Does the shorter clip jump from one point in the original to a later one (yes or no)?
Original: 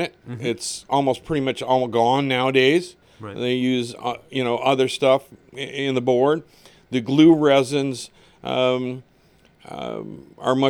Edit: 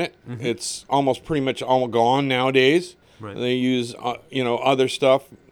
no